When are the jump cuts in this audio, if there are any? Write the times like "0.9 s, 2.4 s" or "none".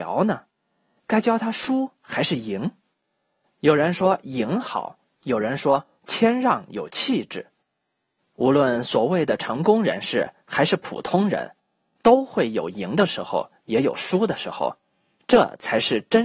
8.2 s